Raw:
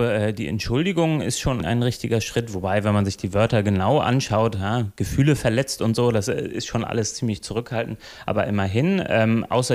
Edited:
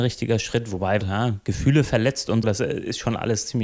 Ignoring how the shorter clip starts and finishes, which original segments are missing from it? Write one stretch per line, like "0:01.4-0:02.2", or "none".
0:02.8-0:04.5
0:06.0-0:06.1